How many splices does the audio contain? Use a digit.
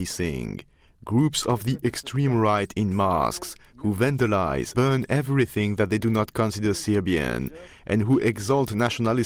1